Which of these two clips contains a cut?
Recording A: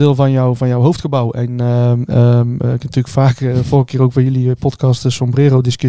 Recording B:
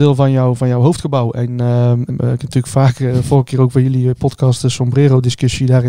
B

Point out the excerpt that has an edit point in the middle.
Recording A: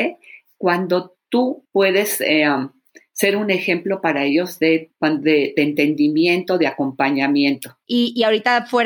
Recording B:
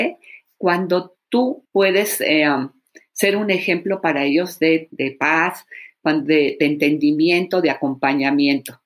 A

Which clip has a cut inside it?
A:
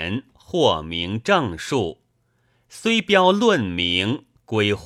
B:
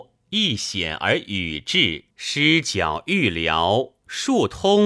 B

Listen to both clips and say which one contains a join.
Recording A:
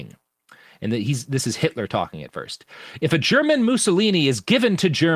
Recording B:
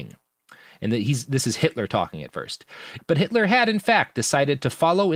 B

